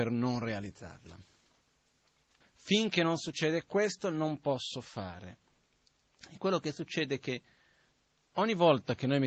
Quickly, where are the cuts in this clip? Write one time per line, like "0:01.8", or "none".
0:02.4